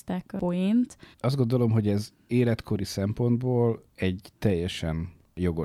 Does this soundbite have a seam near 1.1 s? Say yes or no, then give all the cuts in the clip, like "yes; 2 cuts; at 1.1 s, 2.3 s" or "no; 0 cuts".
yes; 1 cut; at 1.1 s